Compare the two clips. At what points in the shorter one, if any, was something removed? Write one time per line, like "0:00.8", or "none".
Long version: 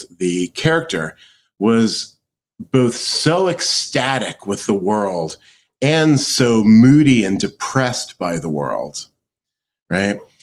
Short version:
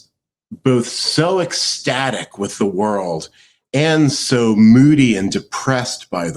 none